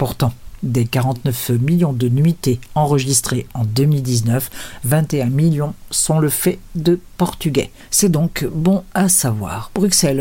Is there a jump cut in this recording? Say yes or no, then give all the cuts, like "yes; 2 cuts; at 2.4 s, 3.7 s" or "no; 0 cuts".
no; 0 cuts